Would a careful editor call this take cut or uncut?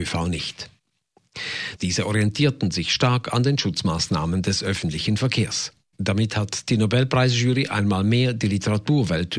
cut